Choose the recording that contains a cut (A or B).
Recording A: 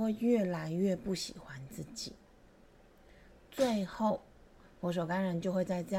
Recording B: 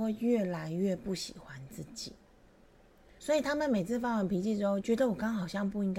B